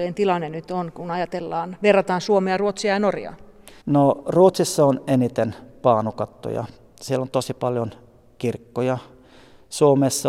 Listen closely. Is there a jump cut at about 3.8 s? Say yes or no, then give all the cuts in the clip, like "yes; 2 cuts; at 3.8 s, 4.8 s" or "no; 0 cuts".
yes; 1 cut; at 3.8 s